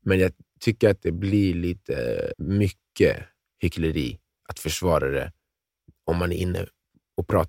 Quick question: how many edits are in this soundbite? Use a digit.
1